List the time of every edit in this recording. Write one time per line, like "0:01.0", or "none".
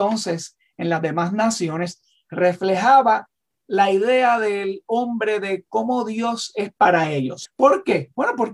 0:07.4